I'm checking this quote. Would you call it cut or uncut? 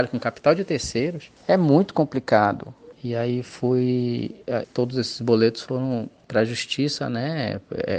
cut